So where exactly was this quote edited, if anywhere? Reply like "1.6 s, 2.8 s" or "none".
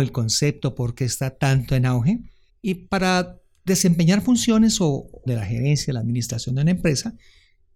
2.5 s, 5.3 s